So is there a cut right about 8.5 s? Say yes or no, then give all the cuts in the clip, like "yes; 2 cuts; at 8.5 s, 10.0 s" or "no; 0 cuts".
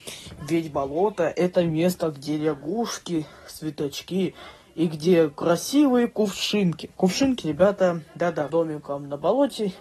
yes; 1 cut; at 8.5 s